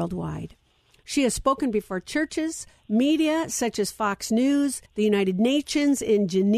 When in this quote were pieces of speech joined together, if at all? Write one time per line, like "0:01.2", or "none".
0:04.9